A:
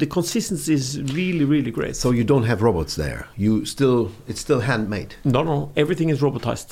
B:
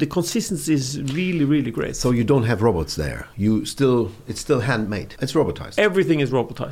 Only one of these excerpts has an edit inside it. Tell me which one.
B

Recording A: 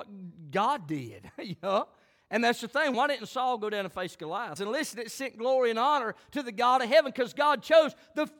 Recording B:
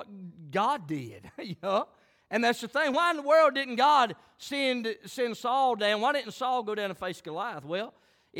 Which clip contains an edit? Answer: A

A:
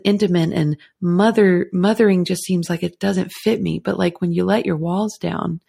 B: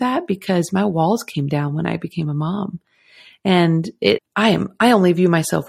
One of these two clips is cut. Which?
B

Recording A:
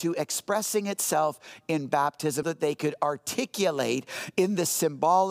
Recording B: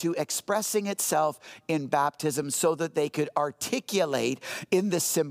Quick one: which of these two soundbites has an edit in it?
A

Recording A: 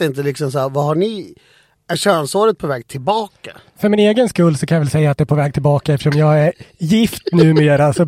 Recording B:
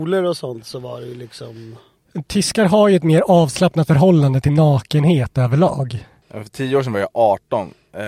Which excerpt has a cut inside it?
B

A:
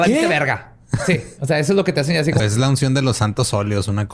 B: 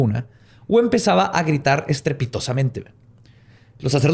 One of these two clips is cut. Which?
A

